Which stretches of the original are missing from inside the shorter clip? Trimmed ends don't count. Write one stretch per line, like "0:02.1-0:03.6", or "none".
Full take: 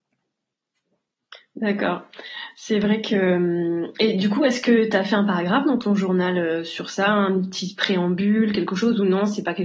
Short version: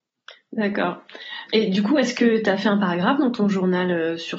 0:02.5-0:03.9